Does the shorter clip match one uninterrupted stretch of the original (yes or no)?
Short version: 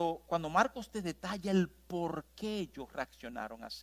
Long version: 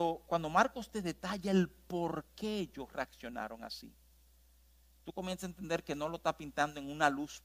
yes